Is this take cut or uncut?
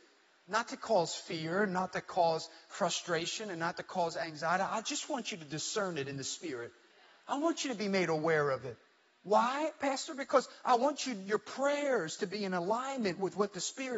uncut